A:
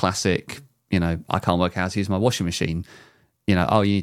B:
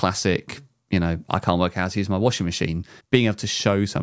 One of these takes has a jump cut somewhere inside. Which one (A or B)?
B